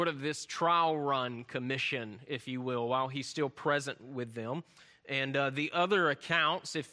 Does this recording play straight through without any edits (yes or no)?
yes